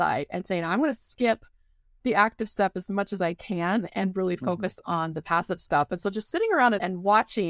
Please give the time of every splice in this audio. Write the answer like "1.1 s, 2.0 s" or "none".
none